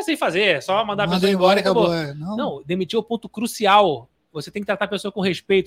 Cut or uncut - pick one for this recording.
uncut